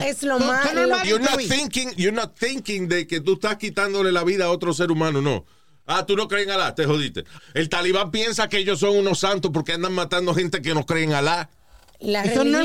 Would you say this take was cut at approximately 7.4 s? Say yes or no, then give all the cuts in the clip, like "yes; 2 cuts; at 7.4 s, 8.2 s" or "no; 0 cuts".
yes; 2 cuts; at 1.0 s, 7.4 s